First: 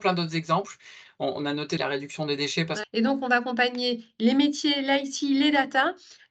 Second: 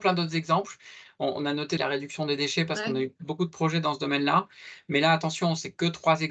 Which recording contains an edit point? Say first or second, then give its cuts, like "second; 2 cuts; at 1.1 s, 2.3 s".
first; 1 cut; at 2.8 s